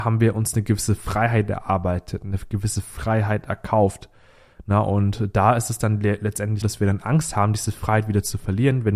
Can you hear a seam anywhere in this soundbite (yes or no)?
yes